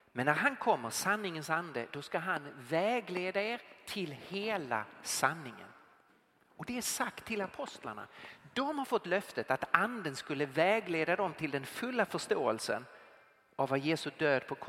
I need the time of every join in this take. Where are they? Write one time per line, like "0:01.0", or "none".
none